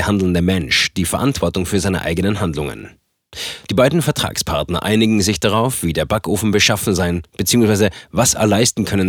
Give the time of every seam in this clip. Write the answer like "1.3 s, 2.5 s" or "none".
3.7 s